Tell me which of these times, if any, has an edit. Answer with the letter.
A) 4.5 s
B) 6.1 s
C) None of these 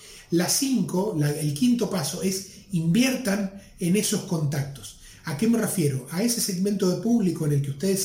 C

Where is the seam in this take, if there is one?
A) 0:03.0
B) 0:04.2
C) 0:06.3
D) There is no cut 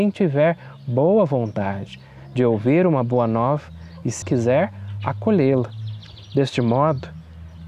B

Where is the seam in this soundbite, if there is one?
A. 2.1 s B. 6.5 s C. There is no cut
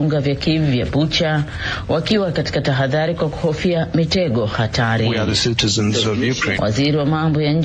B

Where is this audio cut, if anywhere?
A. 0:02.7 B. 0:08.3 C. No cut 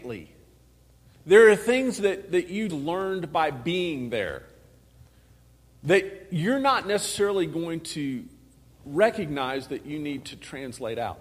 A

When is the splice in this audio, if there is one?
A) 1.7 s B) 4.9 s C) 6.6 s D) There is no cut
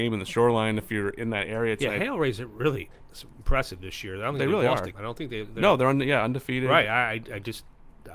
B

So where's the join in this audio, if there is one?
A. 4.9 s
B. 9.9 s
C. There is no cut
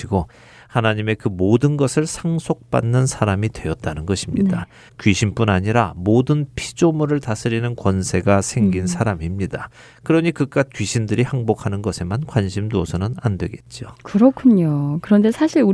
A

